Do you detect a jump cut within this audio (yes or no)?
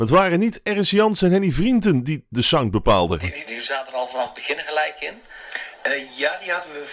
yes